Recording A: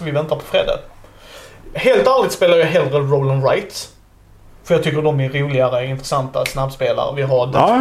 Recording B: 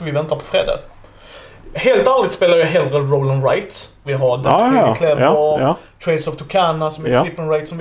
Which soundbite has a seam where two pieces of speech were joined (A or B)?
B